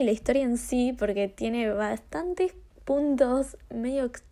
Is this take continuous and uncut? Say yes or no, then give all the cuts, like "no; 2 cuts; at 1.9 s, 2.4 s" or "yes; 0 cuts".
yes; 0 cuts